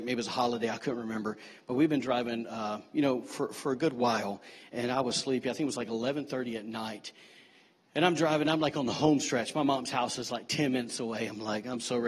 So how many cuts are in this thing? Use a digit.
0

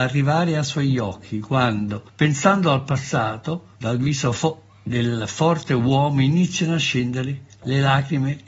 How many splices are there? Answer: 2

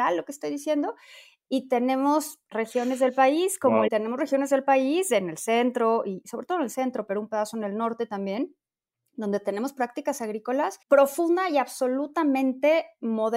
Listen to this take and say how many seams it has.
2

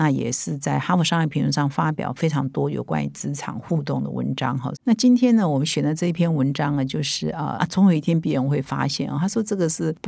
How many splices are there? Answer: 2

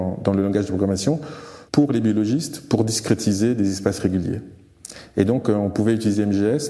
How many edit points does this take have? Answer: 1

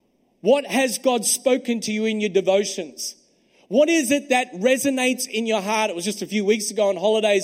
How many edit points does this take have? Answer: 0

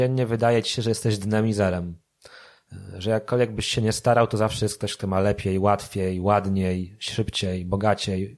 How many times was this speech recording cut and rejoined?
0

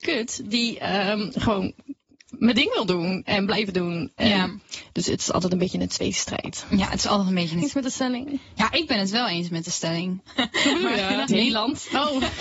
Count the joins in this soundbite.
3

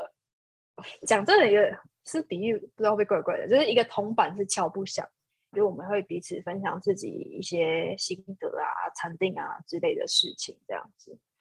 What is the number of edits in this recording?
1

